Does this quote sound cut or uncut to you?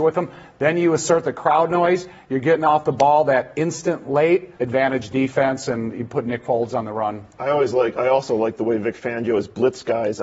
cut